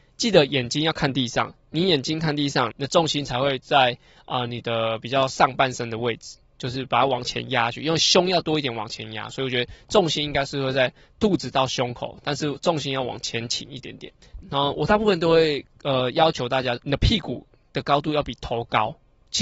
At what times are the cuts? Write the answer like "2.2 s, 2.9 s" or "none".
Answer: 2.7 s, 14.4 s, 16.8 s